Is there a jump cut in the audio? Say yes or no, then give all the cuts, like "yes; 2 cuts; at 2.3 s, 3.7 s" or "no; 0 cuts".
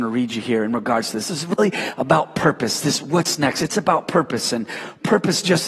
no; 0 cuts